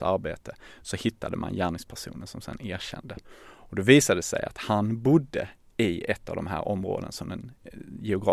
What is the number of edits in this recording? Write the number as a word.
zero